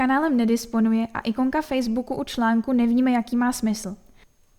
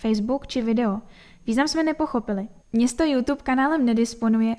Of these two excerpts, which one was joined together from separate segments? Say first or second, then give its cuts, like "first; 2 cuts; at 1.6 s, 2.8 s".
second; 1 cut; at 2.6 s